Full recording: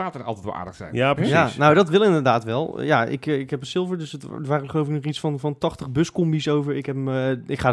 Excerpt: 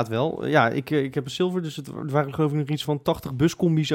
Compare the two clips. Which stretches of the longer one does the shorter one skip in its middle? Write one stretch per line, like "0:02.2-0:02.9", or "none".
0:05.2-0:05.4